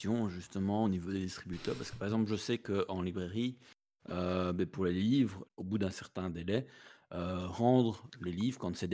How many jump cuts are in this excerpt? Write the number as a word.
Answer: one